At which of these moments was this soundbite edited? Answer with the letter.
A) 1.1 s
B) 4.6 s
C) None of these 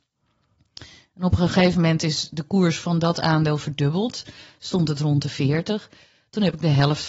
C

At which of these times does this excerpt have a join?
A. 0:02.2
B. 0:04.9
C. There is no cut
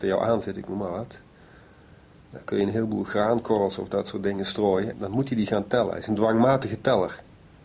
B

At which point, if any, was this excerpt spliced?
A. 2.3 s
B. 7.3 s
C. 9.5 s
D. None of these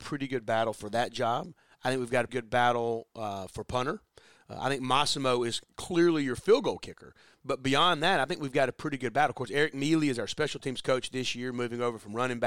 A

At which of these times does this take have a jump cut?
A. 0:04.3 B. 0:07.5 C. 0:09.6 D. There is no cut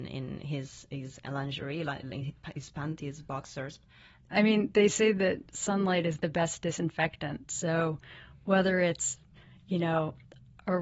A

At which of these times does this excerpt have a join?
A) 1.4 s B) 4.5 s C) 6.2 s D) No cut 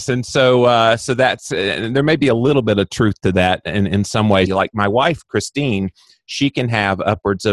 B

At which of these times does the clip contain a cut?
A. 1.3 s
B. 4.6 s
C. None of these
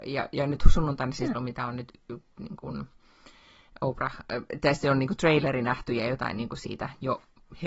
A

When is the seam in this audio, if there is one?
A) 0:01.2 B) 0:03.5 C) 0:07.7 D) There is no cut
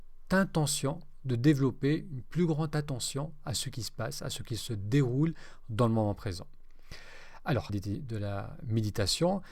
C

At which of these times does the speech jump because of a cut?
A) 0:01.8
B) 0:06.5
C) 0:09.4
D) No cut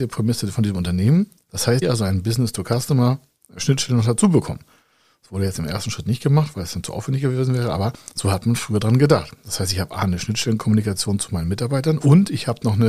A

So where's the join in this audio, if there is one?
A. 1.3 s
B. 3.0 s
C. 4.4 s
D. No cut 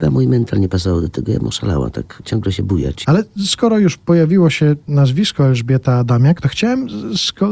B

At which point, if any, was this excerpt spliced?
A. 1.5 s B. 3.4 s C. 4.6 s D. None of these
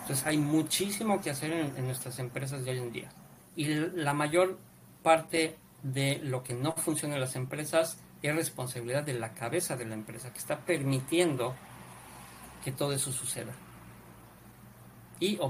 B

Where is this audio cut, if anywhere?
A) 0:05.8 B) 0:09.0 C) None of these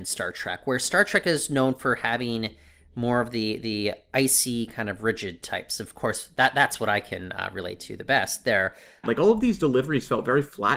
B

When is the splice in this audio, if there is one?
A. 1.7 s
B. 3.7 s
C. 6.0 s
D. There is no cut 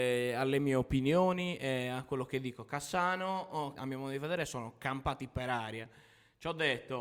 B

